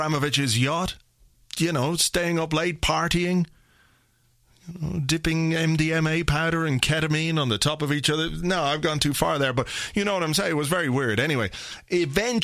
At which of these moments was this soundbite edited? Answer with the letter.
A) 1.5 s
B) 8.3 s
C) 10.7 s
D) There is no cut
D